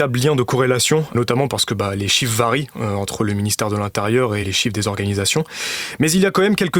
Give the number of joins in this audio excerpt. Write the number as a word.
one